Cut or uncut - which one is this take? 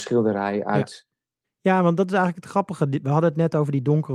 cut